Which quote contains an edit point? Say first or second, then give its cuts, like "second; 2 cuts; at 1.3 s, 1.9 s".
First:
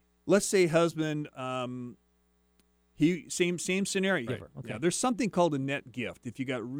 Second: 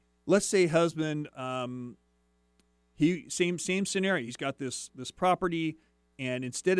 first; 1 cut; at 4.3 s